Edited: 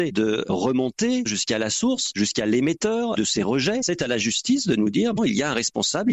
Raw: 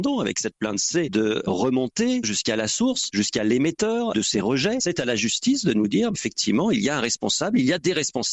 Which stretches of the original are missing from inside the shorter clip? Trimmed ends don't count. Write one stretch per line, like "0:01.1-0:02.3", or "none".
0:06.1-0:06.6